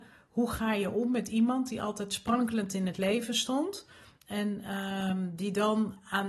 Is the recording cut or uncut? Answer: uncut